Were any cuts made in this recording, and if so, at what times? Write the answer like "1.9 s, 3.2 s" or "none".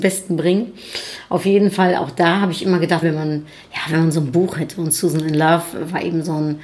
3.0 s